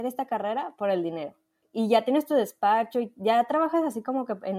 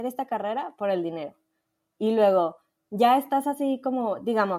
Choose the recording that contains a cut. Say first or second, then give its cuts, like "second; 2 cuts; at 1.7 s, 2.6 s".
first; 1 cut; at 1.6 s